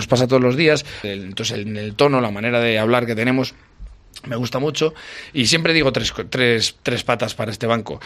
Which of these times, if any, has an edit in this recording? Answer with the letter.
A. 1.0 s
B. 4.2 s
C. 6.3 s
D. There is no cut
A